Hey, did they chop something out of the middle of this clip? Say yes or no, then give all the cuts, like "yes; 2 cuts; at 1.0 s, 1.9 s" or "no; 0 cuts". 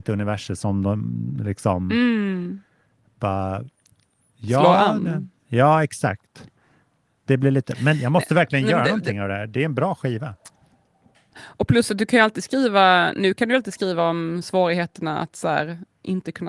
no; 0 cuts